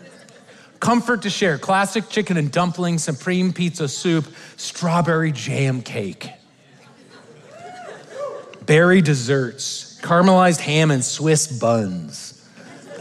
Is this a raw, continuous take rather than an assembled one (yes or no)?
yes